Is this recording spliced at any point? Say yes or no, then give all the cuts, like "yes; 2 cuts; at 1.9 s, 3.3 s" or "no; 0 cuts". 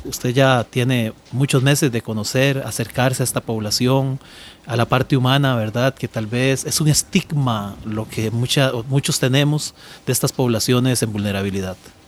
no; 0 cuts